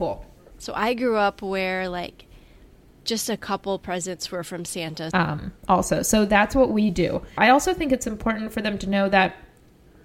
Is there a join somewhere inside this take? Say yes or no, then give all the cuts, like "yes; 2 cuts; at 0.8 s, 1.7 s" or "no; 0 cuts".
yes; 2 cuts; at 5.1 s, 7.4 s